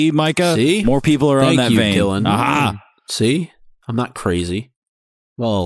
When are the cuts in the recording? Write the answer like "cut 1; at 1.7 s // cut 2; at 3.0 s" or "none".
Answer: none

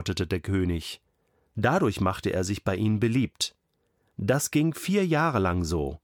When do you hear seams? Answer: cut 1; at 1.5 s

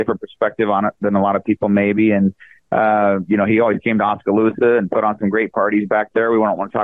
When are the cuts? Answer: none

